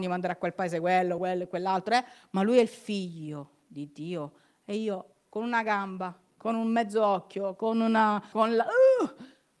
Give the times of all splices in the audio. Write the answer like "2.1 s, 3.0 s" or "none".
1.2 s, 8.3 s